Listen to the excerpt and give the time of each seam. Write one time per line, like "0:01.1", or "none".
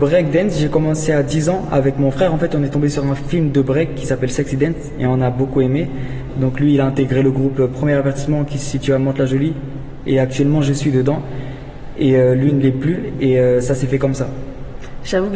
0:06.3